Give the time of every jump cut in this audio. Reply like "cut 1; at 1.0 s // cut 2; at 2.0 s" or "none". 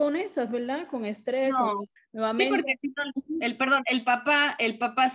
cut 1; at 2.0 s